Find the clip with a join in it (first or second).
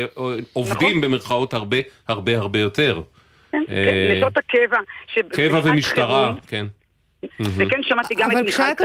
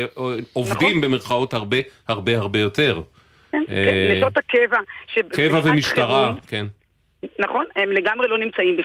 first